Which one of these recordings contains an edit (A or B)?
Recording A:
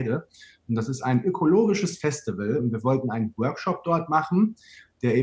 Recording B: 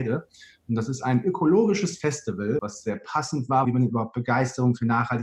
B